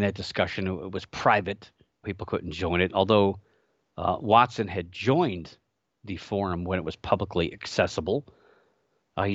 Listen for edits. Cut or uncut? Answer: cut